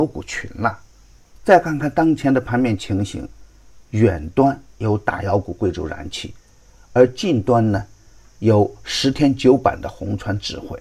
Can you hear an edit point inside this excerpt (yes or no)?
yes